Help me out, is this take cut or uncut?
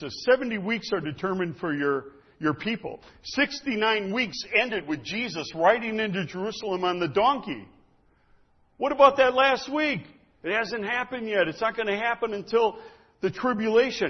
uncut